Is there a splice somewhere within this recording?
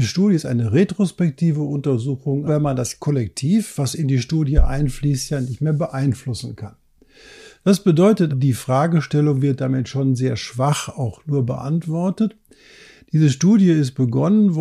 yes; 2 cuts; at 2.5 s, 8.3 s

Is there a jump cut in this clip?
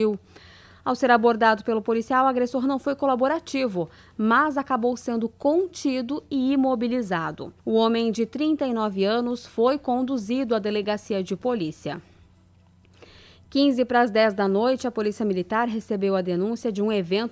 yes; 1 cut; at 7.6 s

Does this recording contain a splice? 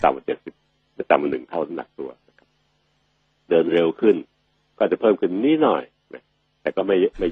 no; 0 cuts

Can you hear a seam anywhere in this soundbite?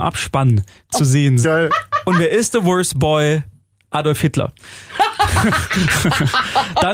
yes; 1 cut; at 1.4 s

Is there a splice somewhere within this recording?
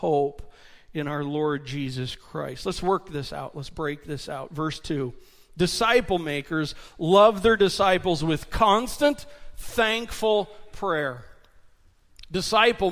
no; 0 cuts

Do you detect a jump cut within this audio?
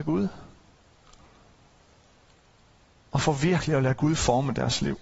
no; 0 cuts

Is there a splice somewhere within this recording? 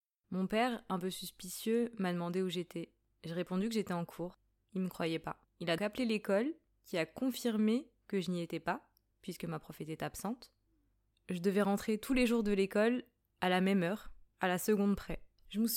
yes; 2 cuts; at 5.8 s, 11.1 s

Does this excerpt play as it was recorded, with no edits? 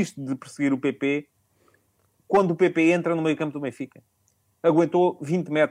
yes; 0 cuts

